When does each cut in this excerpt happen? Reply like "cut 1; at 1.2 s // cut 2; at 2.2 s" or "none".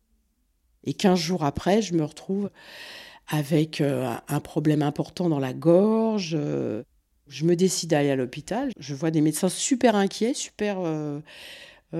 cut 1; at 8.7 s